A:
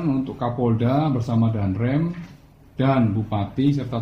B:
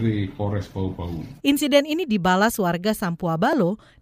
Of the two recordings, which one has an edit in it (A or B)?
B